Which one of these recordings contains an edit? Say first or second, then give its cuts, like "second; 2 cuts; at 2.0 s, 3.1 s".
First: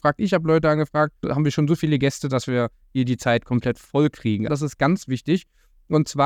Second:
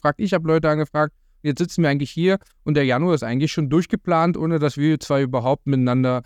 first; 2 cuts; at 1.2 s, 4.5 s